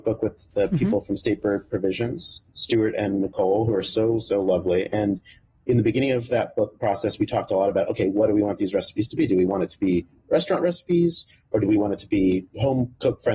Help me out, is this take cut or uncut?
uncut